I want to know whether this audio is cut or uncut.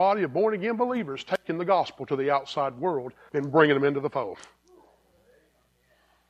cut